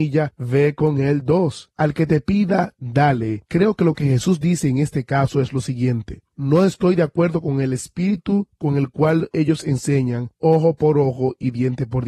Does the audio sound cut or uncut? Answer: cut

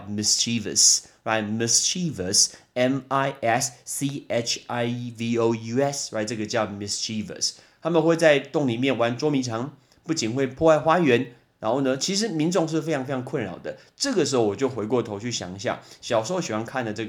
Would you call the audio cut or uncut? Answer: uncut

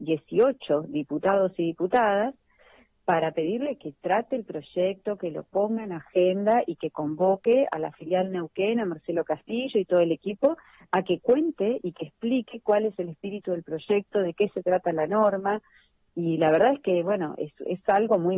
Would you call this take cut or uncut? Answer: uncut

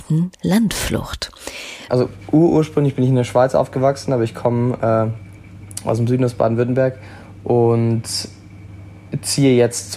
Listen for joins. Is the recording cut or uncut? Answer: cut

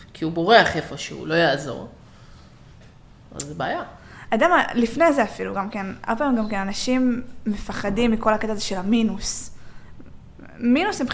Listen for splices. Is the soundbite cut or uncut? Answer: cut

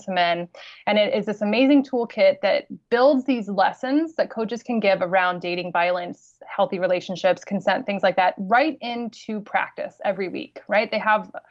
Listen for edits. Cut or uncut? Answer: uncut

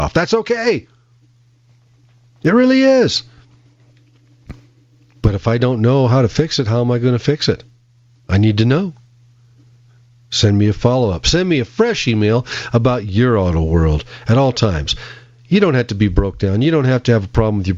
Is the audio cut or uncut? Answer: uncut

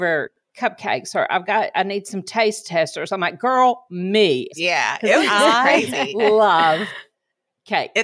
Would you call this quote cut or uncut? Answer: cut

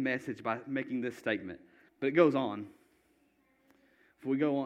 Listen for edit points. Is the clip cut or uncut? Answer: cut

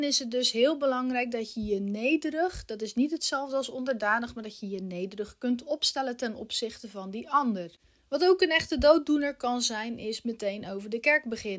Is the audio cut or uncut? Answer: uncut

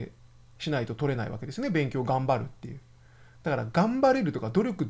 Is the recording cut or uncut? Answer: uncut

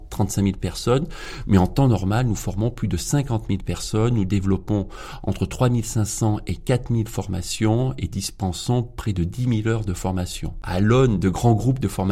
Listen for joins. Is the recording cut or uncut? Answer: uncut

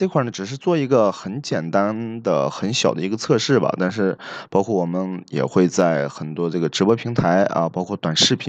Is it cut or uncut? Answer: uncut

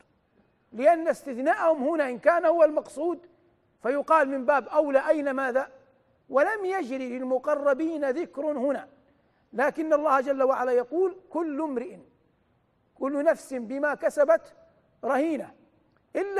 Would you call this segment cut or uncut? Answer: cut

